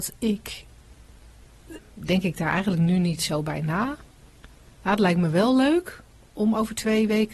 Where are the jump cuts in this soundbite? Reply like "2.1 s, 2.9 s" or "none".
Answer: 1.8 s